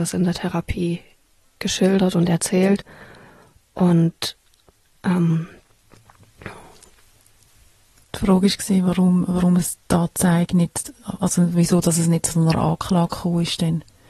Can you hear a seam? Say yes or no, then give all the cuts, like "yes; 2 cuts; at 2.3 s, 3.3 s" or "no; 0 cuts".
no; 0 cuts